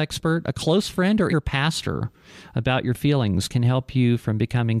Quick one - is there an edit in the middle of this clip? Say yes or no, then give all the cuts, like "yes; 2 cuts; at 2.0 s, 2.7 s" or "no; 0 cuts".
yes; 1 cut; at 1.3 s